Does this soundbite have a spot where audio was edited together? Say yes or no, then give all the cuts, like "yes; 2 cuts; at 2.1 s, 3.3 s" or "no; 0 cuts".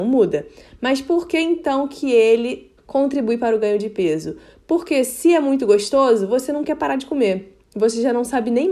yes; 1 cut; at 2.8 s